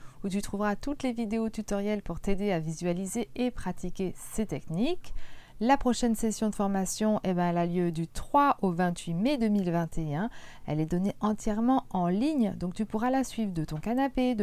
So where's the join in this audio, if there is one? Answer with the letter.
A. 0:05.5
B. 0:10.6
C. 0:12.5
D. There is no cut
D